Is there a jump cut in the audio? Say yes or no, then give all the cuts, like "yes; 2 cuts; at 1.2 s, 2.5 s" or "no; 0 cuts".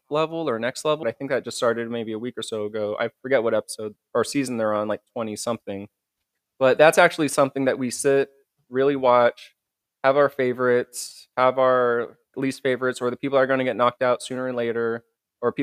yes; 2 cuts; at 1.0 s, 12.3 s